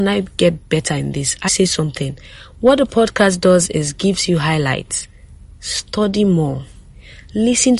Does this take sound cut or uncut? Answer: cut